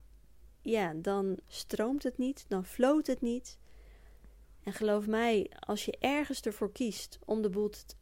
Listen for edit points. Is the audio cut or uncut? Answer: cut